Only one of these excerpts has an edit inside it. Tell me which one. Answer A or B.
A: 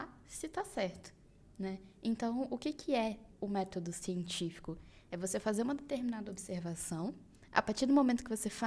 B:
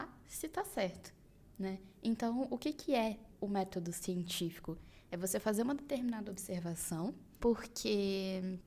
B